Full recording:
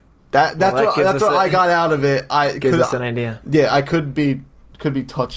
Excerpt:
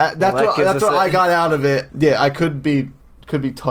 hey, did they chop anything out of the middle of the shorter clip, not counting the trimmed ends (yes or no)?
yes